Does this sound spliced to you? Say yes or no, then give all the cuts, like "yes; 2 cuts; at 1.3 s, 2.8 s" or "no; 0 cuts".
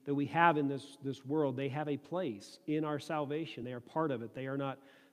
no; 0 cuts